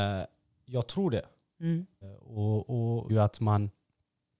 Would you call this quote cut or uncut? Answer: cut